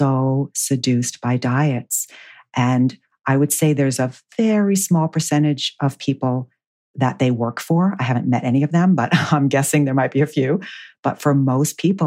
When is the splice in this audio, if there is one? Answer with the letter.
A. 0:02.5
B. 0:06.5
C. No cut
C